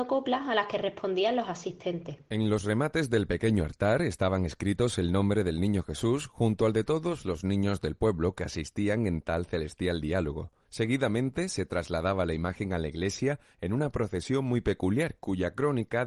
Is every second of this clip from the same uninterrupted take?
yes; 0 cuts

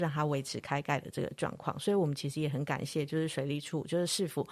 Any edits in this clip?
no; 0 cuts

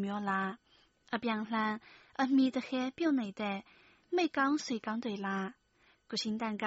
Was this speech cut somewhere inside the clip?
no; 0 cuts

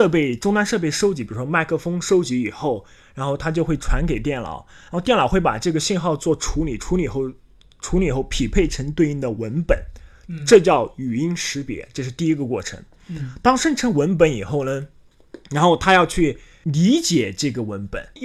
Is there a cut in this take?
no; 0 cuts

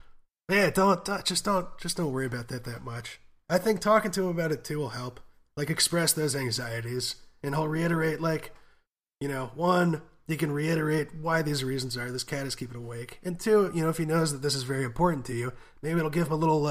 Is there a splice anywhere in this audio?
no; 0 cuts

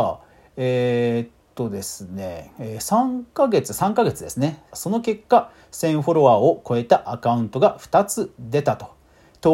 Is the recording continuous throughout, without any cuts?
no; 1 cut; at 4.7 s

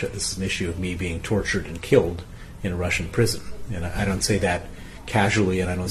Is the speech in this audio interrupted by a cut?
no; 0 cuts

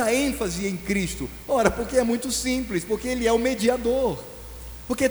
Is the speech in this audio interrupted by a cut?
no; 0 cuts

